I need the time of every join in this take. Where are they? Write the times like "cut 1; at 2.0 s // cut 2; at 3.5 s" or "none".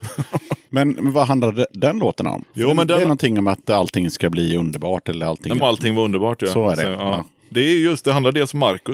cut 1; at 5.6 s